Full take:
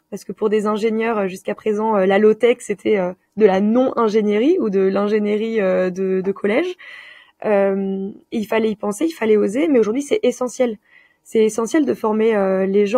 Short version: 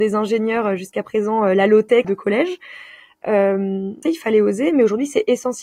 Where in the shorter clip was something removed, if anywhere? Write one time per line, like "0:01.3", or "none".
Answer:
0:02.0
0:04.0